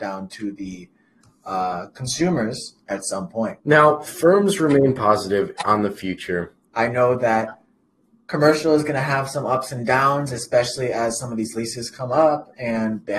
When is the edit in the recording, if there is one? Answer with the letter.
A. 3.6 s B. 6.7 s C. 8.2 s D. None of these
B